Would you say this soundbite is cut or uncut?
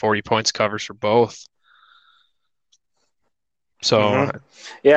uncut